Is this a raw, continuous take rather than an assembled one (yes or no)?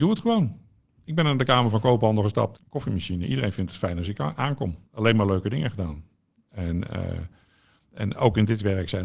no